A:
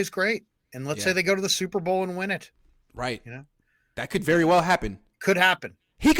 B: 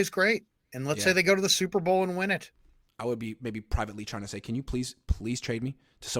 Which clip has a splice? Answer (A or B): B